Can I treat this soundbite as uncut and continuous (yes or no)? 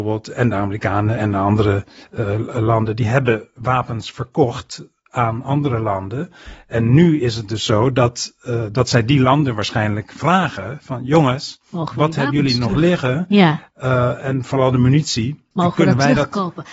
yes